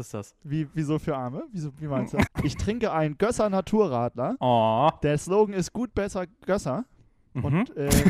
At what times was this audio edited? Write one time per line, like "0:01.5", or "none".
0:02.3